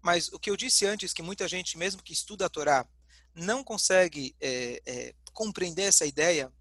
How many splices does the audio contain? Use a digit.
0